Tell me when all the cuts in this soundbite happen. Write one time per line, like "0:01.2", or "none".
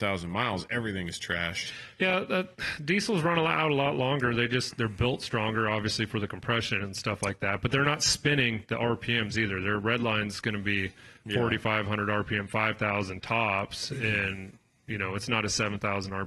none